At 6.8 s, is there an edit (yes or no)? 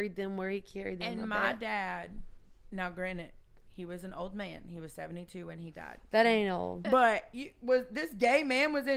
yes